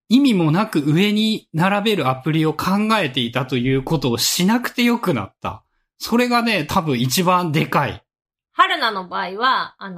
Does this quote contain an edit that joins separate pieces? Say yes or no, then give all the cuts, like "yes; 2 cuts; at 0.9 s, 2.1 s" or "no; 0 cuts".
no; 0 cuts